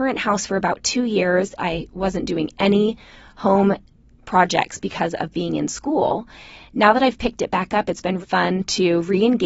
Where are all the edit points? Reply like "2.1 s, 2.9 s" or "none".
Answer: 1.6 s, 8.2 s